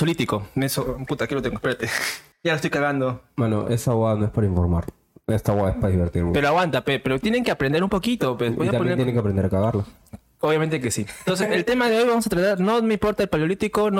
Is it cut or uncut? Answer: uncut